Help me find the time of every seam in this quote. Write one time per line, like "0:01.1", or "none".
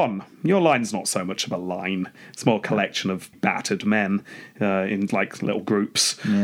0:03.3
0:05.1